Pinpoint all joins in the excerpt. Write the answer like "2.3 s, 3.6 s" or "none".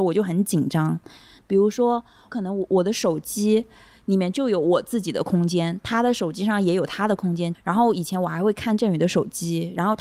1.4 s, 7.5 s